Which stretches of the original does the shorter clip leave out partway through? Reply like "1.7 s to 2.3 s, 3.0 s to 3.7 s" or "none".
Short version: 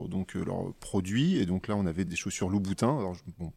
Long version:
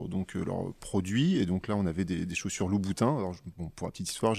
2.1 s to 2.3 s